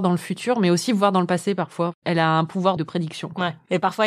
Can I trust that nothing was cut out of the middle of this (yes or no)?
no